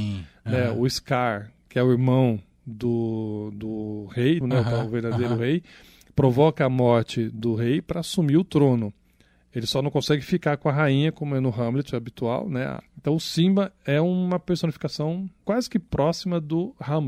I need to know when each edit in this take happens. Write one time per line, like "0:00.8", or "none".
0:04.4
0:12.8
0:15.4

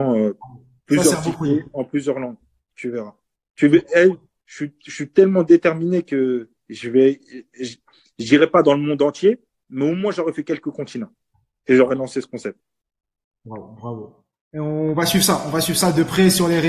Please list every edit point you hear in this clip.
none

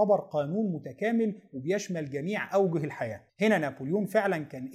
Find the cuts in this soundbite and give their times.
0:03.3

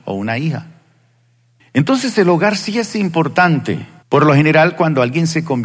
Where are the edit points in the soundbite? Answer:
0:01.6
0:04.0

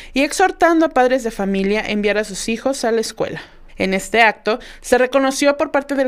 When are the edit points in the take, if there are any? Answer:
0:03.7

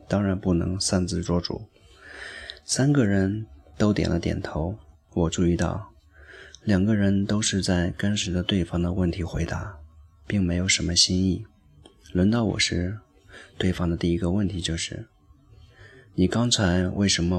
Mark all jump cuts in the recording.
0:04.9

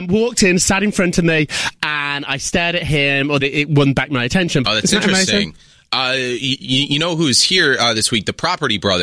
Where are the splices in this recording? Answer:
0:03.4
0:04.6

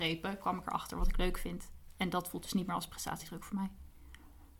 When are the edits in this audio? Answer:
none

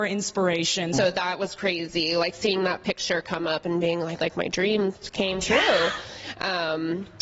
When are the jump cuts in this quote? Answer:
0:00.9
0:04.2

